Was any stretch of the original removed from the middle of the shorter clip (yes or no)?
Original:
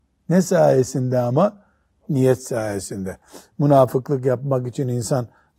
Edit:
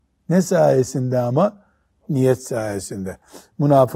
no